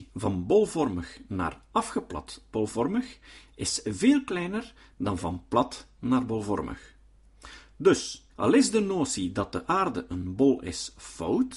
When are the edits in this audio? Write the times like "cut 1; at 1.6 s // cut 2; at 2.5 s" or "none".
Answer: cut 1; at 8.3 s